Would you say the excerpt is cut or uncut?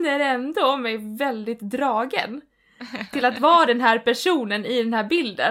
uncut